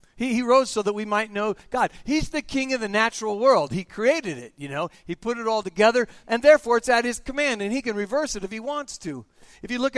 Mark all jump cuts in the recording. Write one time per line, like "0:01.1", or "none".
0:06.2